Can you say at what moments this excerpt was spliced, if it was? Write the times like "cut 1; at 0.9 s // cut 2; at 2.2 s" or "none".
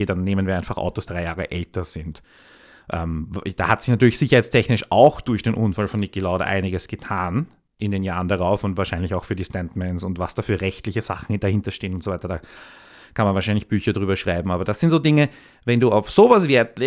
cut 1; at 1.1 s